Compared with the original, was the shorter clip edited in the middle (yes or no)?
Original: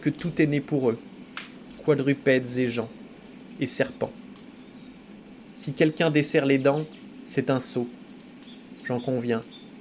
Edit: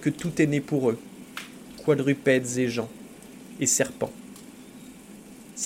no